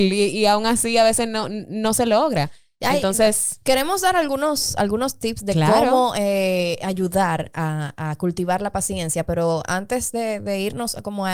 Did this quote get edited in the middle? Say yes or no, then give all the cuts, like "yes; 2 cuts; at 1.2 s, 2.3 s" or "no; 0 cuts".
no; 0 cuts